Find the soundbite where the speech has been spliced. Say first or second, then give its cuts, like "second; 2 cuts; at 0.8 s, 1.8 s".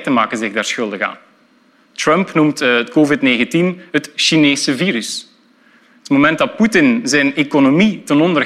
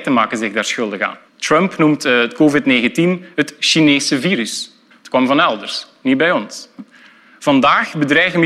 second; 2 cuts; at 1.3 s, 4.9 s